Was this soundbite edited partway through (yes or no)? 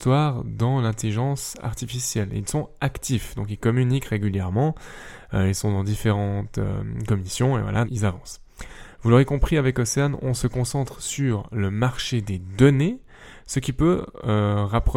yes